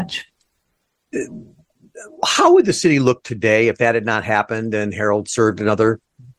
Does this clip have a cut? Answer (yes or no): no